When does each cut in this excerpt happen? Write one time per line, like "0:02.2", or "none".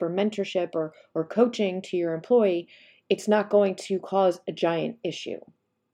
none